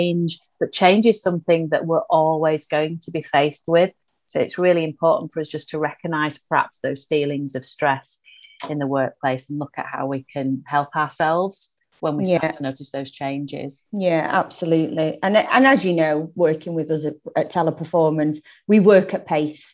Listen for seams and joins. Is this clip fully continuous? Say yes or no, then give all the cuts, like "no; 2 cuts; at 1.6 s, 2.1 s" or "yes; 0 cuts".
yes; 0 cuts